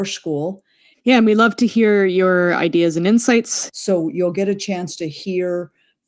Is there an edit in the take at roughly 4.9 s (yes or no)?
no